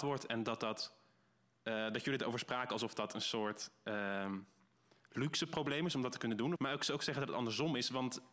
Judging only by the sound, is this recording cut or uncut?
cut